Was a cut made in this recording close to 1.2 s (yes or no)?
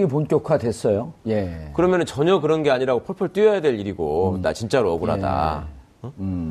yes